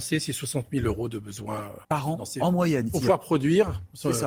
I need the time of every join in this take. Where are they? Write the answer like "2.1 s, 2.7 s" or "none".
1.8 s, 2.9 s

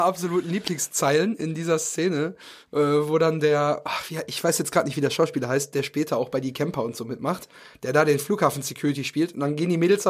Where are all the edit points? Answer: none

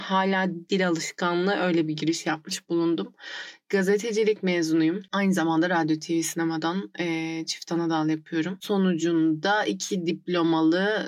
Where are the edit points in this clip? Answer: none

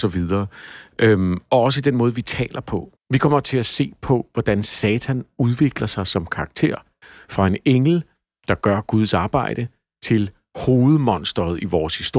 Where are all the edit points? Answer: 3.0 s

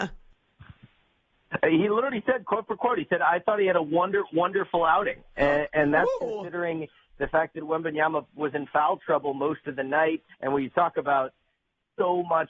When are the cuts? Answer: 10.3 s

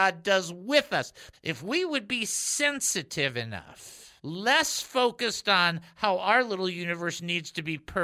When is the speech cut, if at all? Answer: 1.3 s, 4.2 s

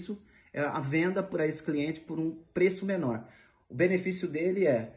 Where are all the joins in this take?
none

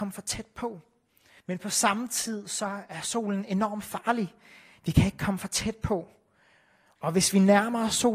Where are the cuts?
1.4 s

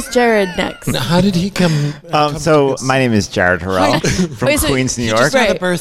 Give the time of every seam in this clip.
2.8 s, 4.0 s

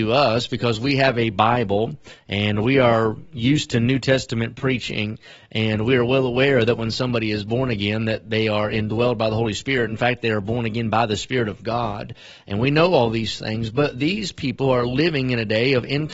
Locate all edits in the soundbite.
none

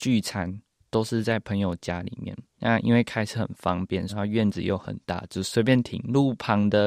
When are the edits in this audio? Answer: 2.5 s, 4.1 s

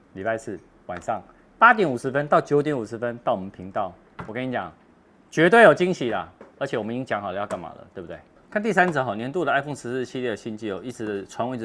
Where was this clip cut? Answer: none

